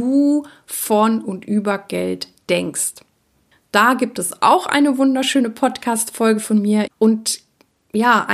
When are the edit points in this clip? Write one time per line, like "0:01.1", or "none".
0:06.9